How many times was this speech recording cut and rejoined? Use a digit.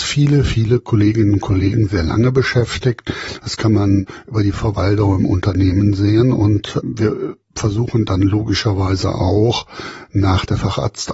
0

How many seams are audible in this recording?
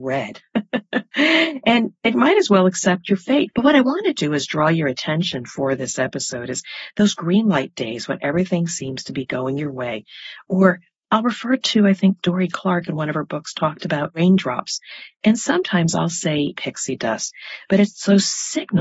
2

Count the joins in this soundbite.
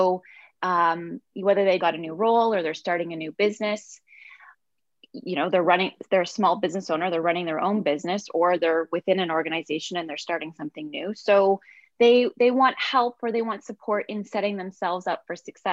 1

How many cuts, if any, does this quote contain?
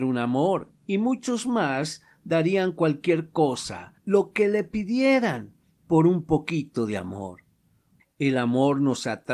1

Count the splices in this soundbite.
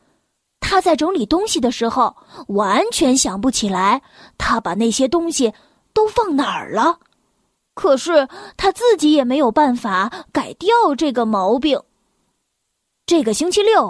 0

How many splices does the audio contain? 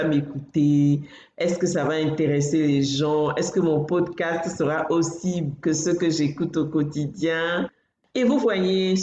1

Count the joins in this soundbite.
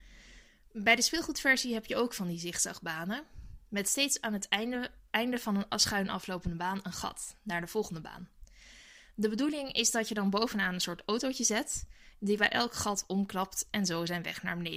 1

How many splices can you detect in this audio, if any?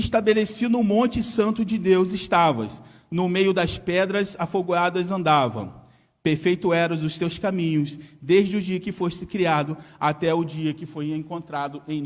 0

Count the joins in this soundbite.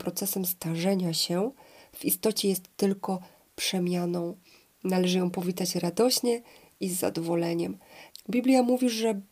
1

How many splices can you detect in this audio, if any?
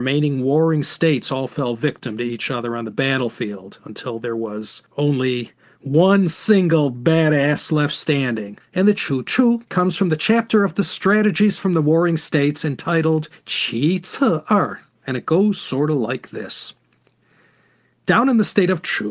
3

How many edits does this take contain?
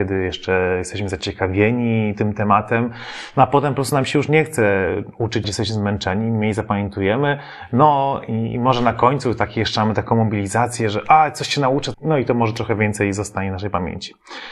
2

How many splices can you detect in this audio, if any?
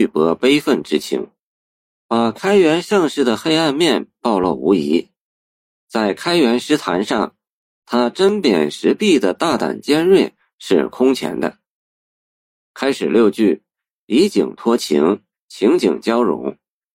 0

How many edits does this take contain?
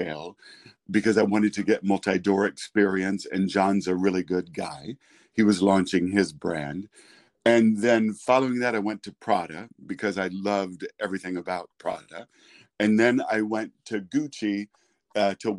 0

